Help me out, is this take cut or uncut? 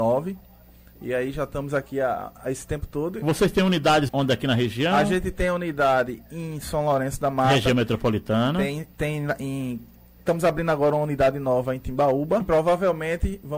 cut